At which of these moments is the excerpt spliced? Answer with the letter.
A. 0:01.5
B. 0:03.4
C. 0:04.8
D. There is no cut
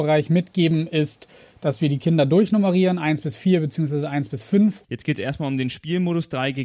C